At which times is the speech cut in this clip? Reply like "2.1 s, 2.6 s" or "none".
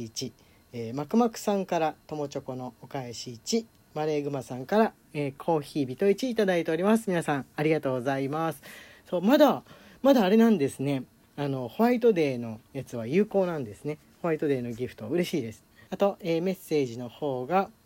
15.9 s